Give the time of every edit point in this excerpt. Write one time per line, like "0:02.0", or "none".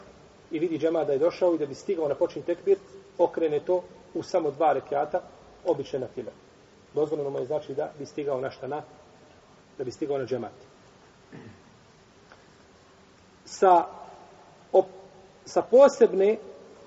none